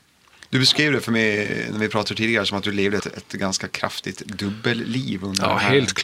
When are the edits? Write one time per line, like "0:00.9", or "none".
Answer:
0:03.0